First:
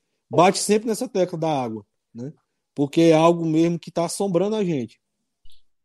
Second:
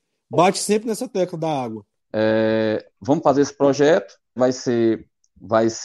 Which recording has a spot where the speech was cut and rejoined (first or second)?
second